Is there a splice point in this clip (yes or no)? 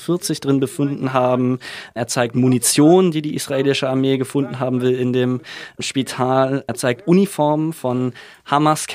no